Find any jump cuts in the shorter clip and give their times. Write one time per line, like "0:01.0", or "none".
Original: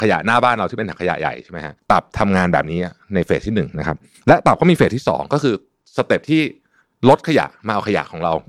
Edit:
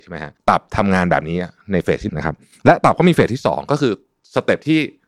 0:02.1